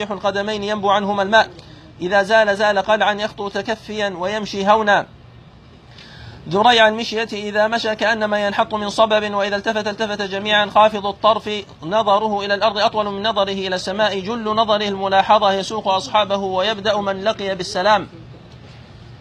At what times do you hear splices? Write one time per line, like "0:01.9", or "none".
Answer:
none

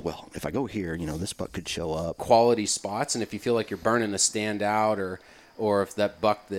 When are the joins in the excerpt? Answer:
0:02.2

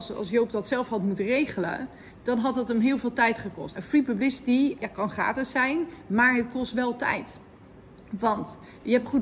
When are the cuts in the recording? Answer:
0:03.8
0:04.8

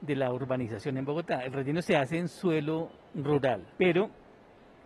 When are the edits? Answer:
0:03.7

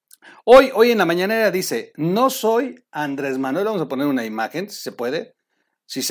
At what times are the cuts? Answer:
none

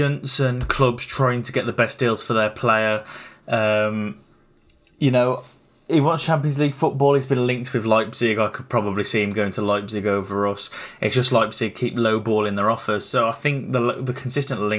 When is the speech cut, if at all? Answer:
none

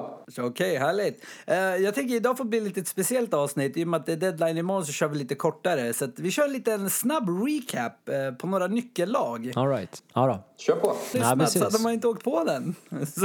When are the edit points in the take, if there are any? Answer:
0:10.0
0:11.1

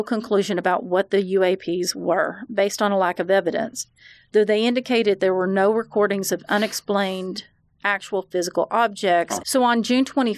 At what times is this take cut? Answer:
0:09.4

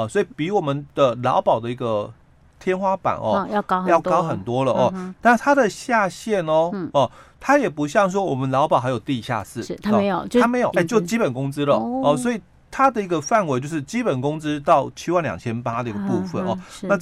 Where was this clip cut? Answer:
0:10.7

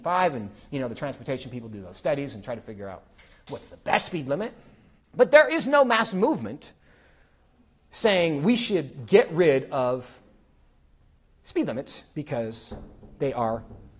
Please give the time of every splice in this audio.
none

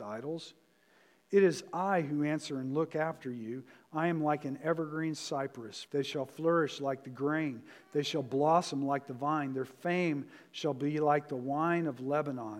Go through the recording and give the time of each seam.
0:05.9

